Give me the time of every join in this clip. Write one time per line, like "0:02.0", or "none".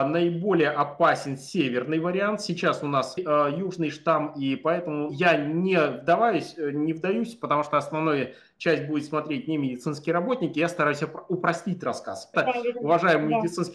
0:03.2
0:05.1
0:12.3